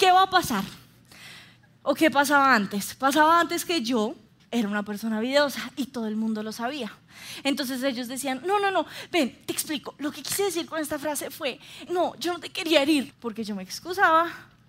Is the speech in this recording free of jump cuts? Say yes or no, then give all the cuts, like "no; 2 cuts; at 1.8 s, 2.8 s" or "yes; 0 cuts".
no; 2 cuts; at 11.9 s, 13.1 s